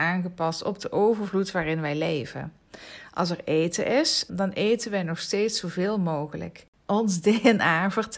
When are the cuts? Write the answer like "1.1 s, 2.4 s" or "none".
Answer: 4.3 s